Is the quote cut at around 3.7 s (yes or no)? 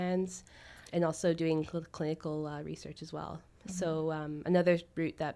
no